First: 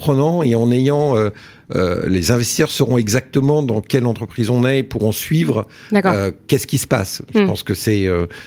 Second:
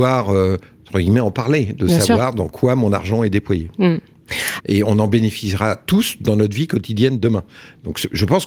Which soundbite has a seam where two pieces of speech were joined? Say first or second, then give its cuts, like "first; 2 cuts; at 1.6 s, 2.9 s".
second; 1 cut; at 4.6 s